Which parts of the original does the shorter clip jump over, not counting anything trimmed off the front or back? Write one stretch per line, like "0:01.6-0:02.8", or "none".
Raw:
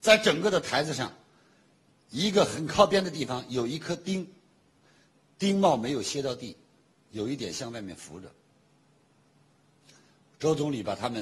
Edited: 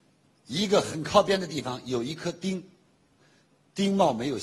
none